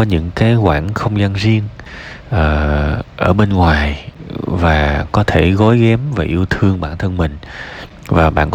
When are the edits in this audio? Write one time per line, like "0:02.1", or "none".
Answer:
none